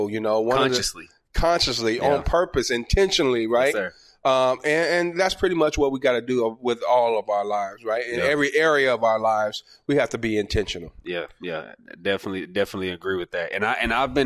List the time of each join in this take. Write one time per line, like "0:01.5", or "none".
none